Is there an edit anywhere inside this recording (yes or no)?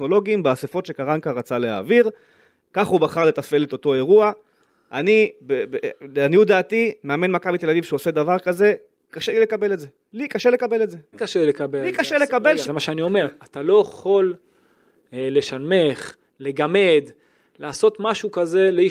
yes